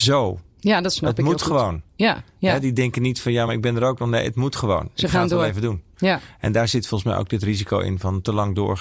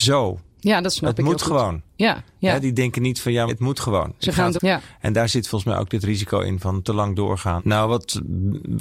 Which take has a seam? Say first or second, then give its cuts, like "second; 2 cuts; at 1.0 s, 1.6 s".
second; 3 cuts; at 3.5 s, 4.6 s, 7.6 s